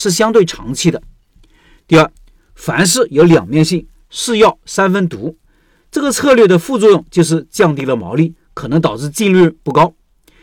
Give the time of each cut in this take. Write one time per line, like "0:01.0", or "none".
none